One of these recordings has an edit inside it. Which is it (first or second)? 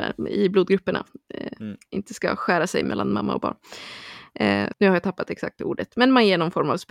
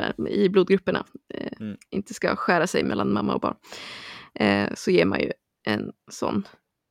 first